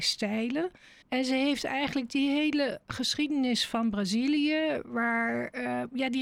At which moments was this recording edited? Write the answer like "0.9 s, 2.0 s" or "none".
1.0 s